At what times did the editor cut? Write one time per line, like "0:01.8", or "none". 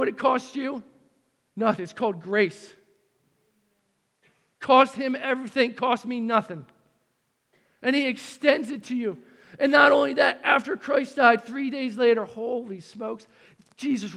none